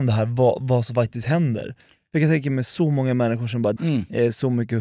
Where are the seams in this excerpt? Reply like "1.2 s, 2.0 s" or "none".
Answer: 3.8 s